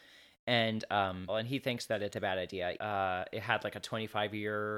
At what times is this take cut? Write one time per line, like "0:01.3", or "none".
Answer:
0:01.3
0:02.8